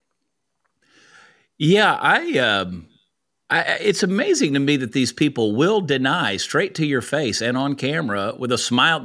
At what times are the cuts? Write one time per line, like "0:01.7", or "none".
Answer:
none